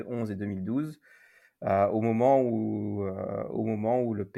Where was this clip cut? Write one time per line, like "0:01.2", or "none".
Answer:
none